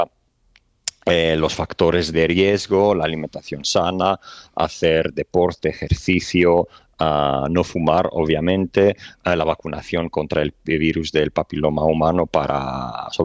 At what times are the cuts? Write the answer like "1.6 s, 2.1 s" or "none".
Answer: 2.1 s